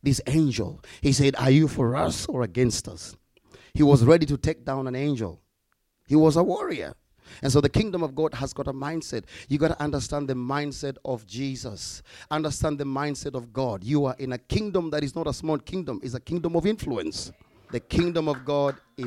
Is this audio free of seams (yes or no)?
no